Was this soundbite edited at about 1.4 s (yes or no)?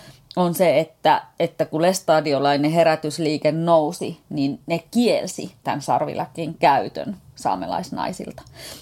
no